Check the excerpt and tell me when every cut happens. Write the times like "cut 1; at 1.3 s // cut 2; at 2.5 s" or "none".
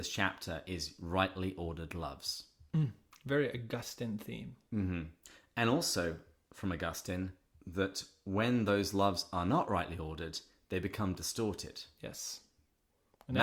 none